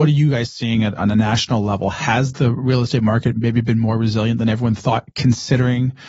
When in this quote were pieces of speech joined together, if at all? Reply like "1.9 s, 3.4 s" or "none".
none